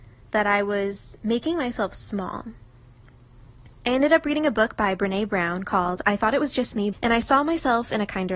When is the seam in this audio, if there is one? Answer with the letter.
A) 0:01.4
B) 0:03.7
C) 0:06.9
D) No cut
C